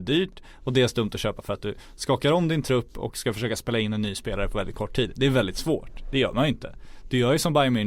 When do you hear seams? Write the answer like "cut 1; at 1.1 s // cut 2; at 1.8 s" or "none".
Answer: none